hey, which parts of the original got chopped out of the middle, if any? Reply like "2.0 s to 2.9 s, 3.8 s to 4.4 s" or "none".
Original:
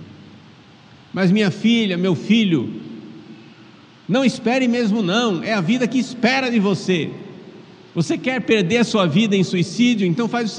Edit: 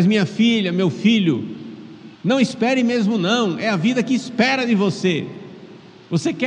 3.4 s to 4.0 s